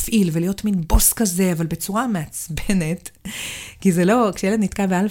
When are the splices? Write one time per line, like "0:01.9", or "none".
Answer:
none